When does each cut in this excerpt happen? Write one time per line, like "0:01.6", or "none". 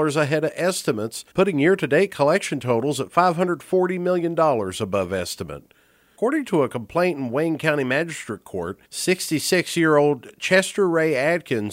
0:01.3
0:06.1
0:08.8